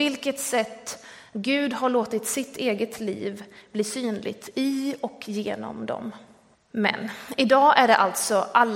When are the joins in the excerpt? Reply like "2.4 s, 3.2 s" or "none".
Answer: 6.5 s